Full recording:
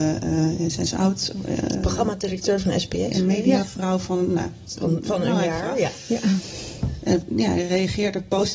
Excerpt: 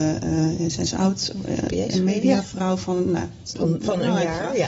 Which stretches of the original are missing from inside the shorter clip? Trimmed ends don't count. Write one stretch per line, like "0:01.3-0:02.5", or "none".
0:01.7-0:02.9